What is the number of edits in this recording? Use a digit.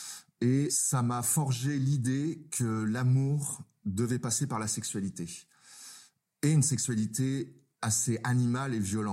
0